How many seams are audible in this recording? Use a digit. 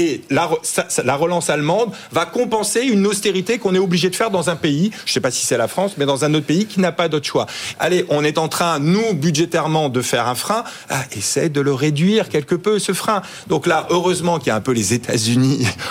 1